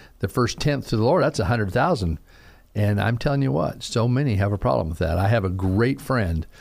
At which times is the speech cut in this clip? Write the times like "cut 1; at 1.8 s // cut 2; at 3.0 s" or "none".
none

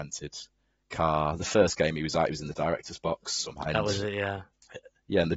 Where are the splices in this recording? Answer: cut 1; at 3.6 s

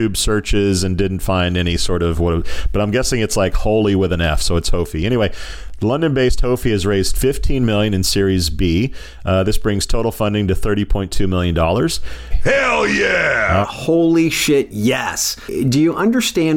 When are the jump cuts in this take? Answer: cut 1; at 12.3 s // cut 2; at 13.6 s

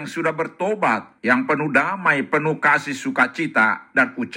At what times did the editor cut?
cut 1; at 1.2 s

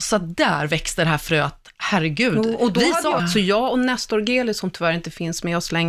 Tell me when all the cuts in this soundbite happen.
cut 1; at 3.2 s

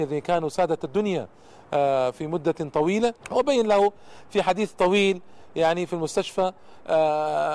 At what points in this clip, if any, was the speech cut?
cut 1; at 3.2 s

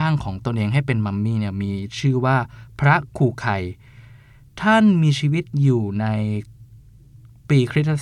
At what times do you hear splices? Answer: none

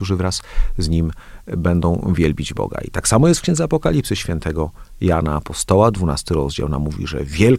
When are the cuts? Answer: none

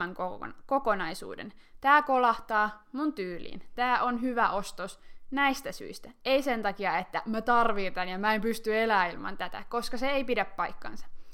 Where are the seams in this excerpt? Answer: none

